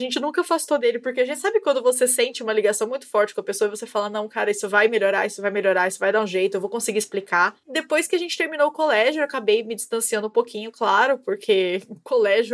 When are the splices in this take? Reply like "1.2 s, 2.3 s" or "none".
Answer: none